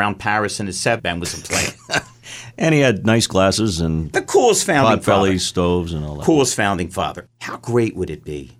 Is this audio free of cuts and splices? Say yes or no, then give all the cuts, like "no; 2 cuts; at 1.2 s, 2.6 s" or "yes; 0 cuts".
no; 2 cuts; at 1.0 s, 7.3 s